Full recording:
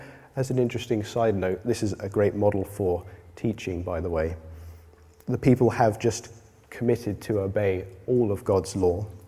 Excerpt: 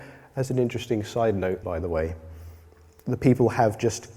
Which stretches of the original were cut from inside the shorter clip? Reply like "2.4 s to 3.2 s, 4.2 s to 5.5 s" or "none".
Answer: 1.6 s to 3.8 s

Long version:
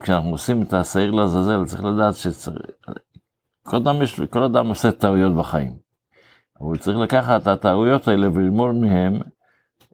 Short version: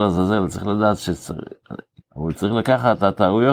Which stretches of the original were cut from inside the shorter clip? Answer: 3.2 s to 6.4 s

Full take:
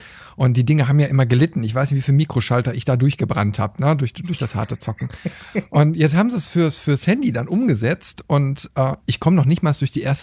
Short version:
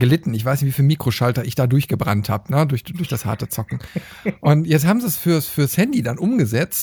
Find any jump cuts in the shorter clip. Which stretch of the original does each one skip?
none

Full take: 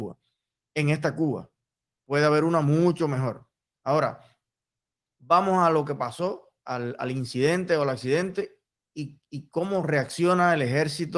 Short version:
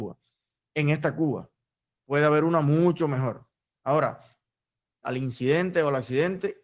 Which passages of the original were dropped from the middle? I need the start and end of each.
5.0 s to 7.0 s

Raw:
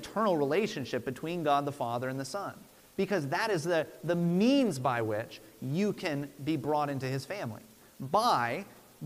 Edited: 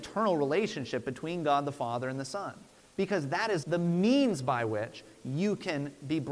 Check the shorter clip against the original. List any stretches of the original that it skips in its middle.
3.6 s to 4.0 s

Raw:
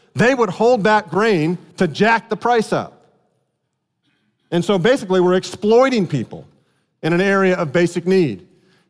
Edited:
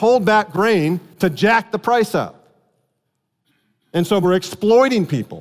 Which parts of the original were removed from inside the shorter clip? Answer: 4.8 s to 5.2 s

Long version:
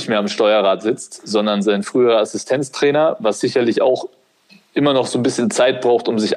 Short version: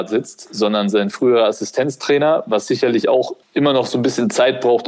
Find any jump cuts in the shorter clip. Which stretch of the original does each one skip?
4.2 s to 4.6 s

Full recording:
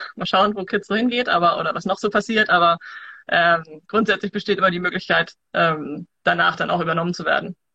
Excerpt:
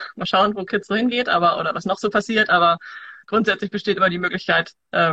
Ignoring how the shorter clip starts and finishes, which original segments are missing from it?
3.2 s to 3.8 s

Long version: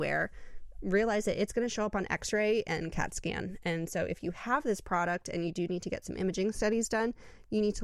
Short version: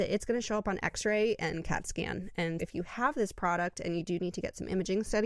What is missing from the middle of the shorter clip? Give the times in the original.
3.9 s to 4.1 s

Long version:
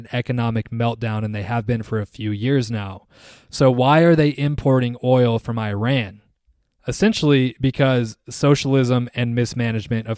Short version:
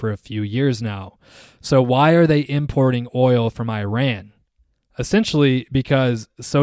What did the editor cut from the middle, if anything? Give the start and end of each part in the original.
none

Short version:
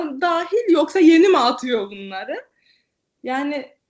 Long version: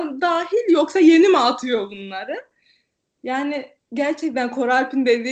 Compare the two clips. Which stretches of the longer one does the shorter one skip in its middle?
none

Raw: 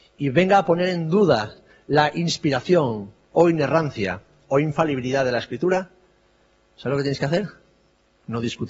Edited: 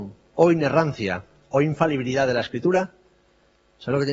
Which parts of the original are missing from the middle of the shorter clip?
none

